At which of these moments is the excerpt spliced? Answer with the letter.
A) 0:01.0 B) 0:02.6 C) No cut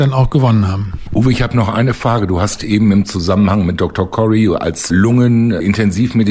C